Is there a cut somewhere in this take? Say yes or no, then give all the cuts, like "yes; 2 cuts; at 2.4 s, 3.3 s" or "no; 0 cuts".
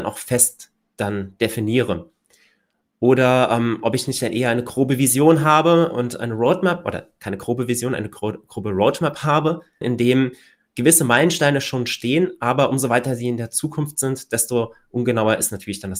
yes; 1 cut; at 9.8 s